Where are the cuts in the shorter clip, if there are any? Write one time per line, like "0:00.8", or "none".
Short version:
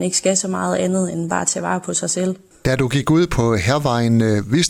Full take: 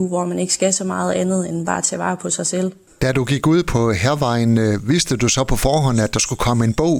none